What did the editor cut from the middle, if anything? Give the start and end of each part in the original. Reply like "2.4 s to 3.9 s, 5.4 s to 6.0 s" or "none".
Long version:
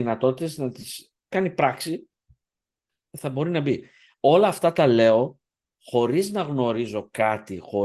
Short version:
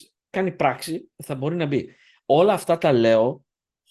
2.1 s to 3.1 s

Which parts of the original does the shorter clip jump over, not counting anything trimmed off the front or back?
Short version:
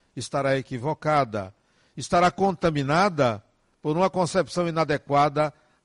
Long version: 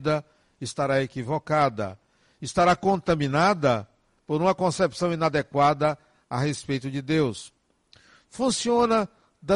none

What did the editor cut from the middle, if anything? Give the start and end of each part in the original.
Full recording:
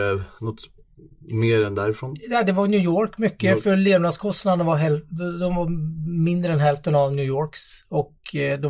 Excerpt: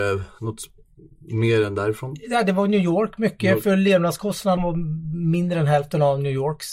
4.6 s to 5.5 s

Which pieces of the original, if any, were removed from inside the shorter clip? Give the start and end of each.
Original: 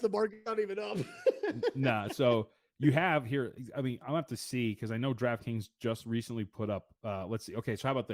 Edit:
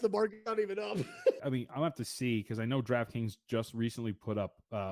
1.4 s to 3.7 s

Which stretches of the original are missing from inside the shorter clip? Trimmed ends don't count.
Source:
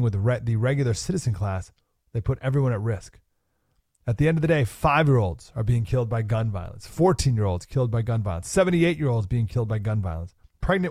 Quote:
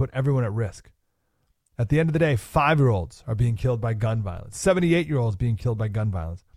6.8 s to 8.4 s

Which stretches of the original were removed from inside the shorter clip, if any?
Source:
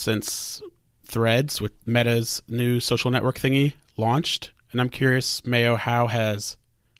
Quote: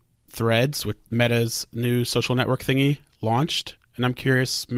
none

